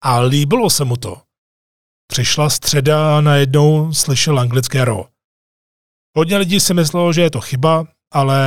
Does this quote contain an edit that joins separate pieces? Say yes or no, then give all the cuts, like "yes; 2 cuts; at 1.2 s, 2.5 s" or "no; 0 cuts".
no; 0 cuts